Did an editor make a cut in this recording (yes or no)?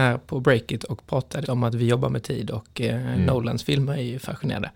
yes